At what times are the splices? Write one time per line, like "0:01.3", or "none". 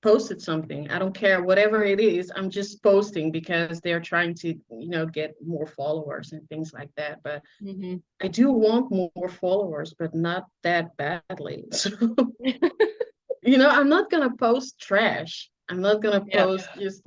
0:15.6